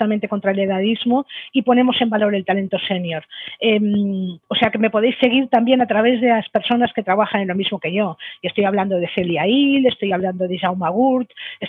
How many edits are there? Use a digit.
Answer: 1